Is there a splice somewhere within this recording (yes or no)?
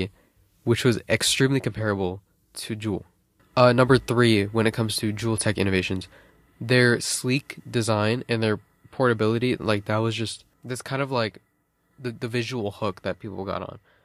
yes